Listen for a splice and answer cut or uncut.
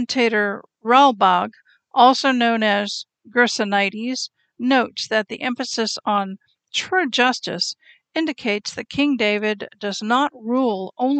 uncut